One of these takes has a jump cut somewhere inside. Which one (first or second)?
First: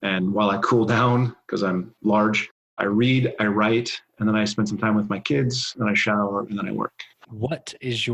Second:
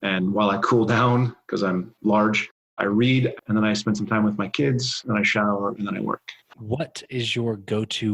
second